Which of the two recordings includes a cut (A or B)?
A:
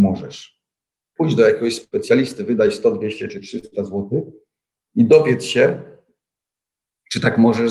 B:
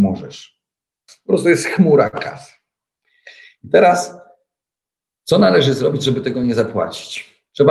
B